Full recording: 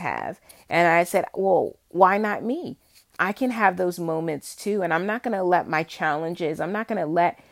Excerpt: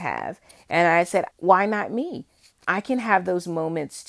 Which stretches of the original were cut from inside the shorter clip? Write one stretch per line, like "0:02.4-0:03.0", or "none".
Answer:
0:01.3-0:01.8